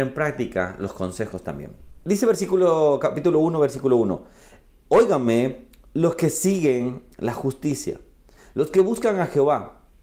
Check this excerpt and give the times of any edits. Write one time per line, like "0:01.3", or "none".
none